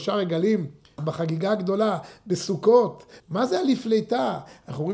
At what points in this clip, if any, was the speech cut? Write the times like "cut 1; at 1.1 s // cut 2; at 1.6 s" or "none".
cut 1; at 1.0 s // cut 2; at 3.2 s